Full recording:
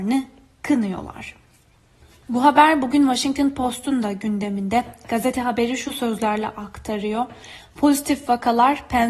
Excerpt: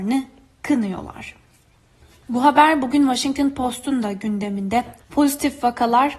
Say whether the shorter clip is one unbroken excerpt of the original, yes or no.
no